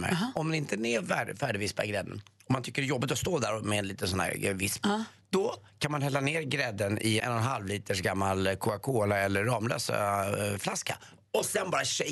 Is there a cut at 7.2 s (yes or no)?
yes